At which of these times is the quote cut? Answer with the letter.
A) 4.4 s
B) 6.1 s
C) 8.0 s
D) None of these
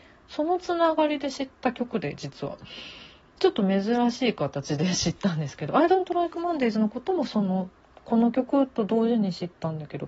C